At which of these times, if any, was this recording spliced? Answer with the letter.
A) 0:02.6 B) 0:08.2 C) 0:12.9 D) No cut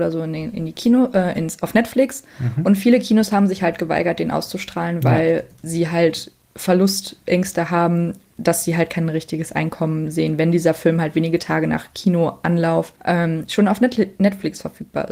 C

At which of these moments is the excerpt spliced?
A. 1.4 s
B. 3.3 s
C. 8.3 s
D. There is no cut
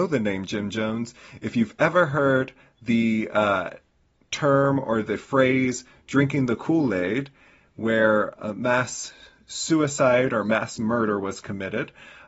C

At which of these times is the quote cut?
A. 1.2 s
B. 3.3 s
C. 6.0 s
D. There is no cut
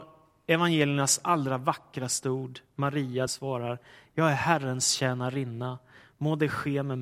B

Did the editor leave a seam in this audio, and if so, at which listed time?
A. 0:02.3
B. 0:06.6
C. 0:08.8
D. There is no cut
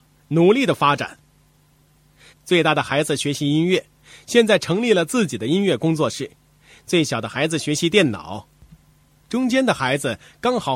A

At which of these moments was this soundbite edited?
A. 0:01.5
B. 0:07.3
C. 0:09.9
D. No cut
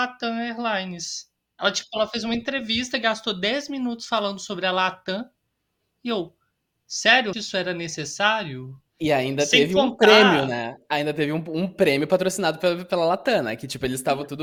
B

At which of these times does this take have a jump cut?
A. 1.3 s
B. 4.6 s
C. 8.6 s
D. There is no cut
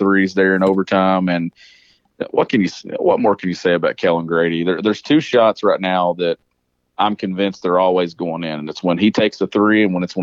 D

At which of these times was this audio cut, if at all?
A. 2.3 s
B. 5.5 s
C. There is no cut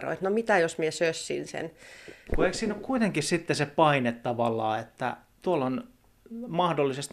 A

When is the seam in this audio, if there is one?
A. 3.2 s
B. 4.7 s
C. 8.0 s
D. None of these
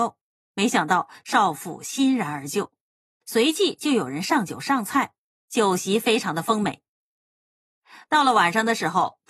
A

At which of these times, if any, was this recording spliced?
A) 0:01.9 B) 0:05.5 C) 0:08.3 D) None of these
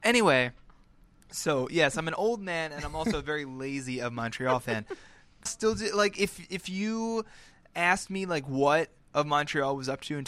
B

